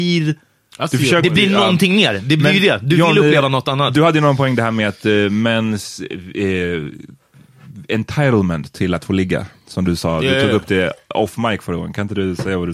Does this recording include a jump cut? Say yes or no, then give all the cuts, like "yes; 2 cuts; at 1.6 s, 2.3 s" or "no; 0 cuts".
no; 0 cuts